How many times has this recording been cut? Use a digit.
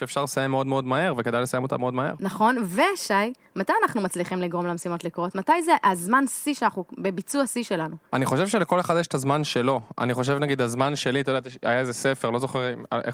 0